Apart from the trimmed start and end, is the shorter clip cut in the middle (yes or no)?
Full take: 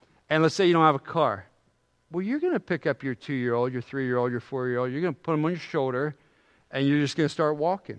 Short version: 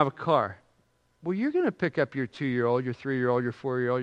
no